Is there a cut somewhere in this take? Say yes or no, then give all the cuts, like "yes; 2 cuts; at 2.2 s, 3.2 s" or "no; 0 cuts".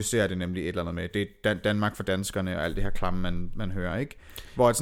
no; 0 cuts